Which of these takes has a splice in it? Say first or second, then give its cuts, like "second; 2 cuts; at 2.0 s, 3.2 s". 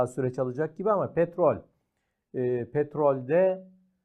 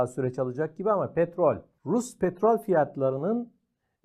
second; 1 cut; at 1.8 s